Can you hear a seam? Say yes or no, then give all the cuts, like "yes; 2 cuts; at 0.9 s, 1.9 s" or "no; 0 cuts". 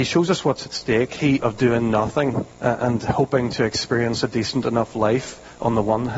yes; 2 cuts; at 1.4 s, 2.5 s